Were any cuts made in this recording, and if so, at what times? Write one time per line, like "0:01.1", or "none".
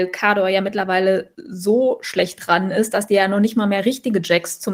none